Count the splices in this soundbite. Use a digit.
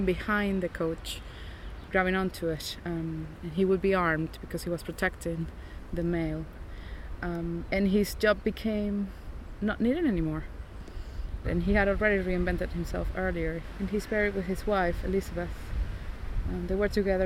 2